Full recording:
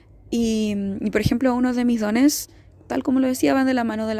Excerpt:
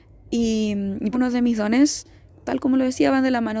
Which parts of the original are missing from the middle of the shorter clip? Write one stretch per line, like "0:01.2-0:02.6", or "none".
0:01.1-0:01.6